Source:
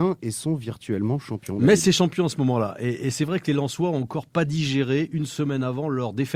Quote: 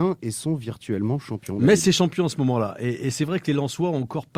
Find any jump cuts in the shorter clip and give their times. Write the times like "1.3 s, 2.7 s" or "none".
none